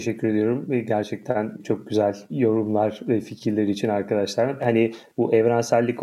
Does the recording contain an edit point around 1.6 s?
no; 1 cut; at 4.6 s

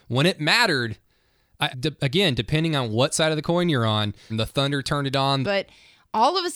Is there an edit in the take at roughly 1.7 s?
yes; 3 cuts; at 1.7 s, 4.3 s, 5.4 s

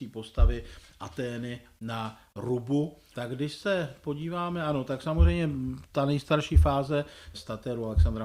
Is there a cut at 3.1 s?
yes; 2 cuts; at 3.1 s, 7.3 s

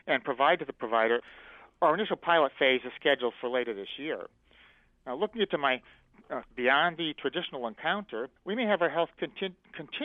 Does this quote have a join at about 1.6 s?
no; 2 cuts; at 6.4 s, 8.4 s

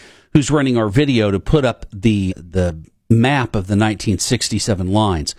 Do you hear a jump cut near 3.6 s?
no; 1 cut; at 2.3 s

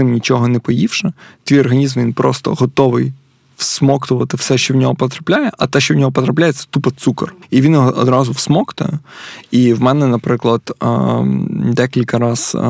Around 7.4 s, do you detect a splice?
no; 0 cuts

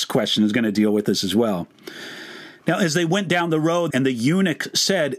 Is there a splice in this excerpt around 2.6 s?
no; 1 cut; at 3.9 s

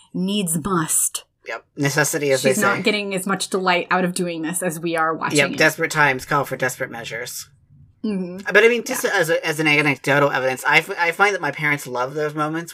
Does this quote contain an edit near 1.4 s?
yes; 1 cut; at 1.4 s

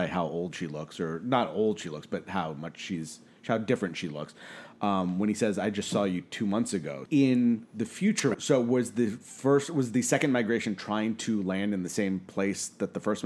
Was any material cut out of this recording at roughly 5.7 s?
no; 2 cuts; at 7.1 s, 8.3 s

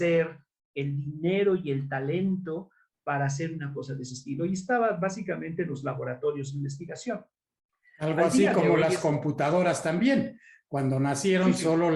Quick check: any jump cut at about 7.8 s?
no; 0 cuts

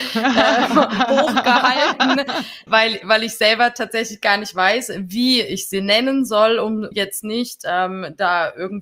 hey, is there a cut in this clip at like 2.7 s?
yes; 2 cuts; at 2.7 s, 6.9 s

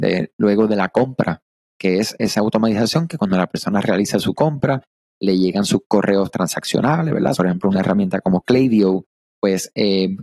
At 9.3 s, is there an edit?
no; 1 cut; at 7.3 s

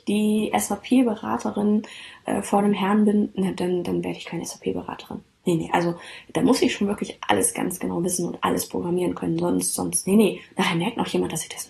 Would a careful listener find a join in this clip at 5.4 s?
yes; 1 cut; at 5.4 s

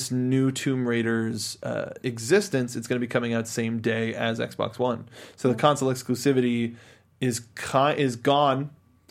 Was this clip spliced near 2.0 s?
no; 0 cuts

